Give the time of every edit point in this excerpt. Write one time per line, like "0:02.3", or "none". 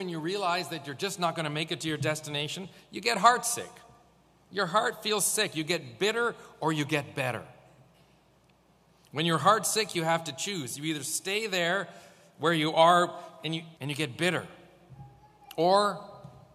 0:13.8